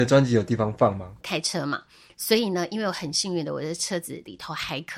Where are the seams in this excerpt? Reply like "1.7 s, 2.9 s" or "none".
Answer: 1.2 s